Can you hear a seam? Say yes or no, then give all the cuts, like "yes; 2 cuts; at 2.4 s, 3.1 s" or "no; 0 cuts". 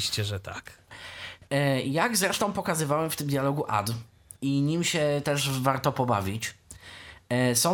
no; 0 cuts